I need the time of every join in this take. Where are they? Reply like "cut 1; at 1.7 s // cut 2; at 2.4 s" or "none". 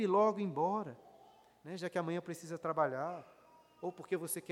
none